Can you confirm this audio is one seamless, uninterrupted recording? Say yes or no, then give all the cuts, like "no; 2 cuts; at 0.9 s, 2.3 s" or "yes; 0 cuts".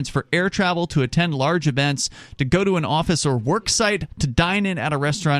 yes; 0 cuts